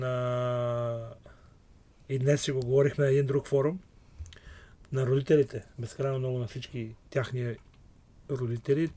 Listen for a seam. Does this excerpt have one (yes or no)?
no